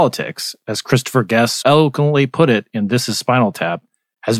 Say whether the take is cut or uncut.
cut